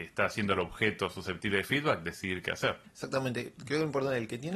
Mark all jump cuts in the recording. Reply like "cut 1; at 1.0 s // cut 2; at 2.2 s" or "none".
cut 1; at 2.8 s